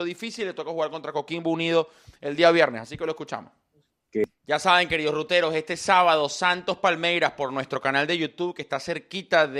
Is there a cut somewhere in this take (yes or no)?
no